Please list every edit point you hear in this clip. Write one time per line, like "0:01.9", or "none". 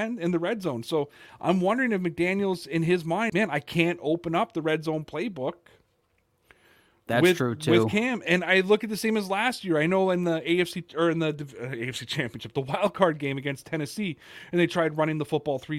0:03.3

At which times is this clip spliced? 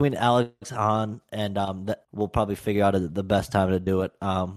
0:02.0

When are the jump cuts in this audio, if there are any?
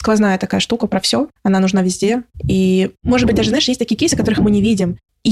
none

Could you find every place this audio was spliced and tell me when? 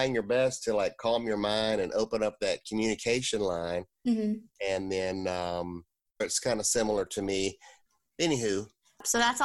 0:06.2

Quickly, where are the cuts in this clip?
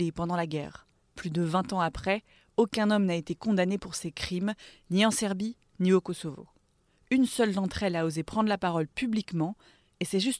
none

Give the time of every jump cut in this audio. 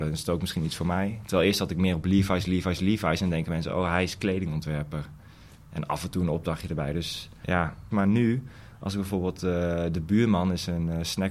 0:07.9

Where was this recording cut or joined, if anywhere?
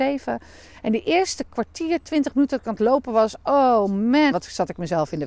0:04.3

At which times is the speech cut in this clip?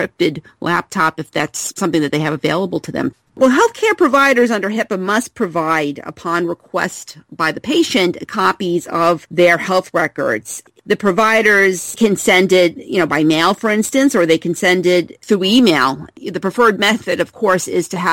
0:03.3

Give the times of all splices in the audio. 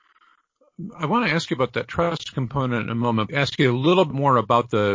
0:03.3

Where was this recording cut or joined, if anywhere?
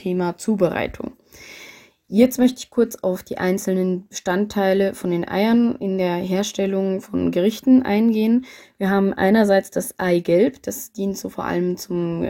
none

